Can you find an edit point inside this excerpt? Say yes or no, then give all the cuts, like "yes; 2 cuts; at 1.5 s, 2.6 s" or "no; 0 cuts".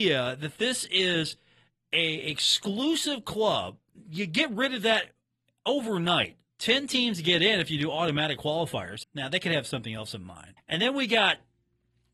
yes; 3 cuts; at 6.5 s, 9.0 s, 10.6 s